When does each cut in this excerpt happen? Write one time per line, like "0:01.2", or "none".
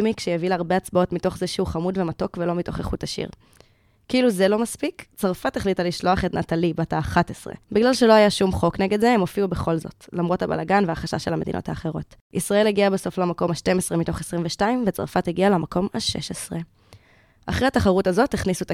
0:07.6
0:12.2

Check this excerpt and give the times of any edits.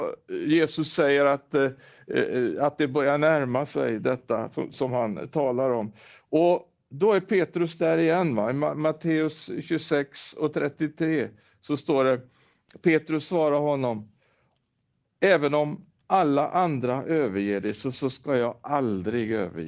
0:04.7

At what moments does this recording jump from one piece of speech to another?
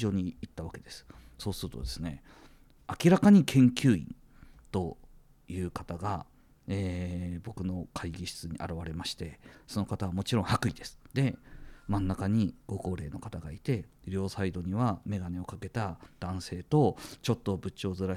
0:11.1

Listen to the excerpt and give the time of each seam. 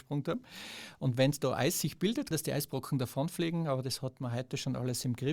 0:02.3

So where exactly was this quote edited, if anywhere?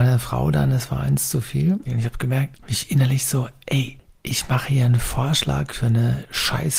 0:01.9

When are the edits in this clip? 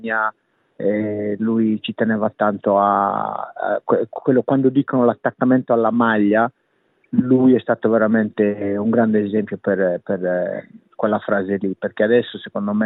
none

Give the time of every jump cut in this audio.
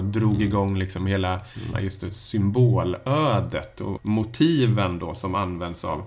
0:01.7
0:04.0

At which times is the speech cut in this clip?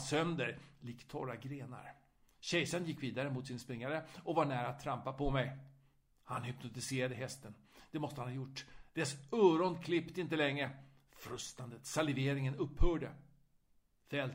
none

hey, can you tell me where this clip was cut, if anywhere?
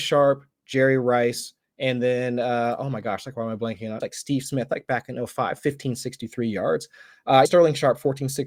0:04.0
0:05.6
0:07.4

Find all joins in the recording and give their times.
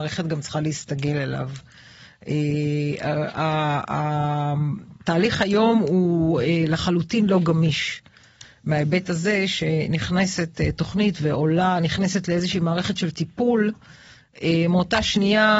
none

